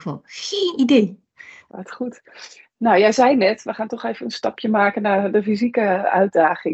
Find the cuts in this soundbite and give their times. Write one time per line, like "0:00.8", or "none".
0:01.7